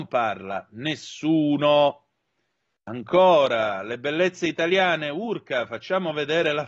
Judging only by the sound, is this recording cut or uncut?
uncut